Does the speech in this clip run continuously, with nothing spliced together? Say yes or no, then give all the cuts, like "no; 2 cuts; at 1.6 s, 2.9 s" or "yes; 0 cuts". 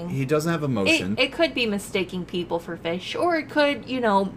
no; 1 cut; at 1.2 s